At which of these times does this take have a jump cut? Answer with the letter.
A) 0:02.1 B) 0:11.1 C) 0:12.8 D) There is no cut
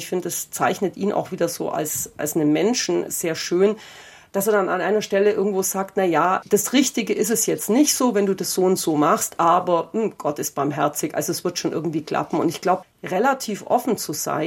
C